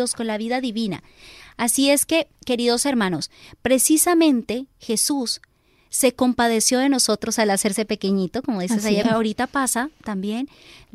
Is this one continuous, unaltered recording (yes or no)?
no